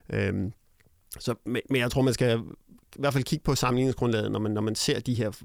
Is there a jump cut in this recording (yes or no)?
no